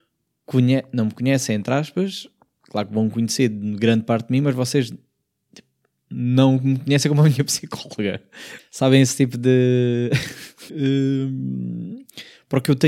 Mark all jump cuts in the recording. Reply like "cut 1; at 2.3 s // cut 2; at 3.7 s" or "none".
cut 1; at 8.6 s // cut 2; at 10.7 s